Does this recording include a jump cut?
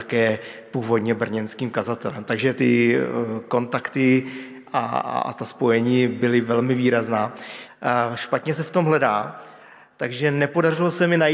yes; 2 cuts; at 2.6 s, 7.7 s

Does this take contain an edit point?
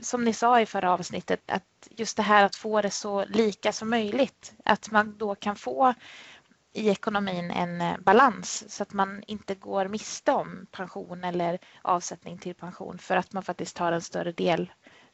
yes; 1 cut; at 1.4 s

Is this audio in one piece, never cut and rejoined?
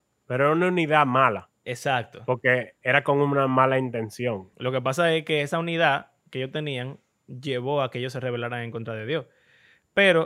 no; 1 cut; at 4.5 s

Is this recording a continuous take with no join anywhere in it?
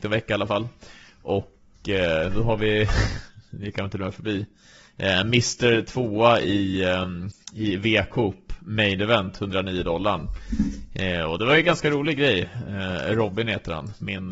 yes; 0 cuts

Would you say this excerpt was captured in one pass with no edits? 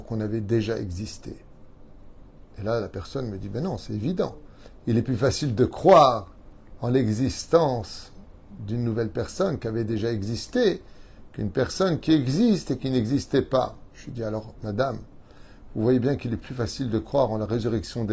yes; 0 cuts

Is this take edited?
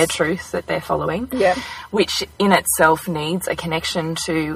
no; 0 cuts

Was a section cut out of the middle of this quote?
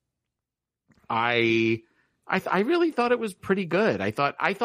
yes; 1 cut; at 3.4 s

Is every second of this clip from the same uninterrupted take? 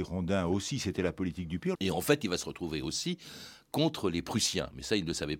no; 1 cut; at 1.7 s

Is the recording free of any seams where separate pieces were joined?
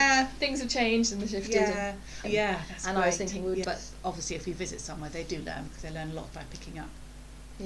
no; 3 cuts; at 2.2 s, 3.6 s, 6.3 s

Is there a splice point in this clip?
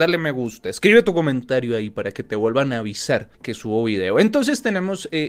yes; 1 cut; at 3.3 s

